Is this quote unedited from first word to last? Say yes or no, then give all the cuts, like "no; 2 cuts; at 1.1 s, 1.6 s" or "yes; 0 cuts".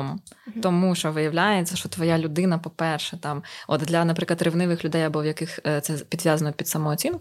yes; 0 cuts